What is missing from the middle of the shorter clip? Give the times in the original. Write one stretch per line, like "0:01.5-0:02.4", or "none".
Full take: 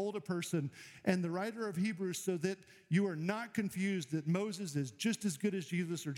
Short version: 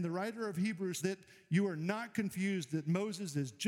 0:02.2-0:02.4